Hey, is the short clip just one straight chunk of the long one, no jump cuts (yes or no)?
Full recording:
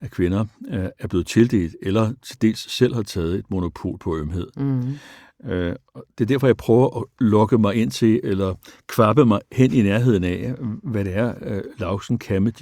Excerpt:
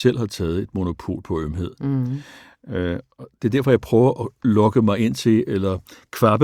yes